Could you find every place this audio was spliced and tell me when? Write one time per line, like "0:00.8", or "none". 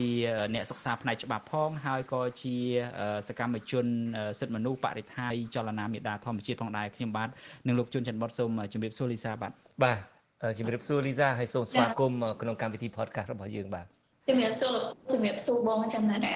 0:05.3